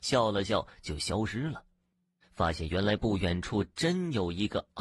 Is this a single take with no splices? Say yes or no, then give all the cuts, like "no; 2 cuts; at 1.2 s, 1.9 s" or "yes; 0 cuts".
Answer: no; 1 cut; at 2.2 s